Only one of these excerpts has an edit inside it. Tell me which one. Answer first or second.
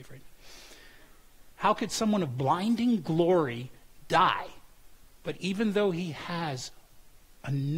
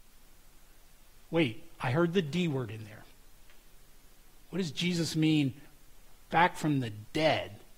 first